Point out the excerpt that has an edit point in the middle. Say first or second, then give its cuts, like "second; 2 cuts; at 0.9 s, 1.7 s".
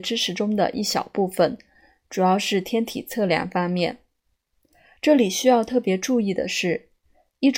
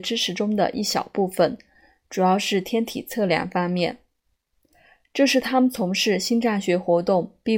first; 1 cut; at 5.0 s